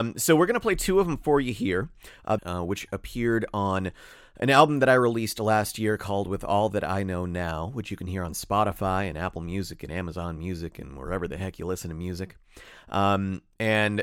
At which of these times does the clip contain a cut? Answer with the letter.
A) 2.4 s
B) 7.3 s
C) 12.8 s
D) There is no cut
A